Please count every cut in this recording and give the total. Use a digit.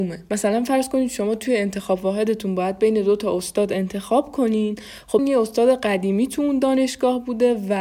1